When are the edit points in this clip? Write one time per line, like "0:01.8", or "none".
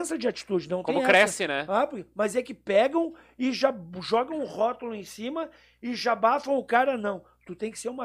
none